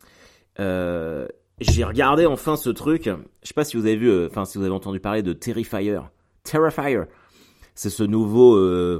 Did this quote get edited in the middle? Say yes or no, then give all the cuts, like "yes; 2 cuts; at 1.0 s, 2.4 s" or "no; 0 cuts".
yes; 1 cut; at 1.6 s